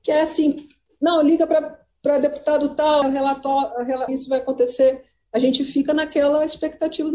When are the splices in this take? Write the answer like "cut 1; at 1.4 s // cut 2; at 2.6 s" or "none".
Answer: cut 1; at 3.0 s // cut 2; at 4.1 s